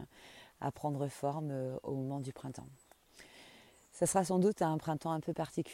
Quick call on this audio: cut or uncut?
uncut